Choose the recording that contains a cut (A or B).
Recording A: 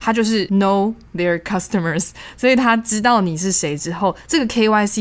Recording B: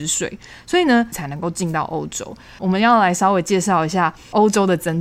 B